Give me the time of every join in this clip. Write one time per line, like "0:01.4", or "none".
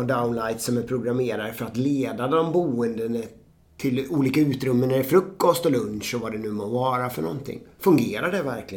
none